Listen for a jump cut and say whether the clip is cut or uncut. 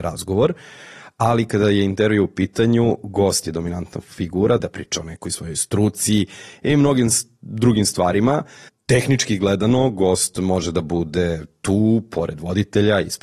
cut